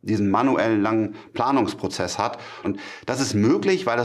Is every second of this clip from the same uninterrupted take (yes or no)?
no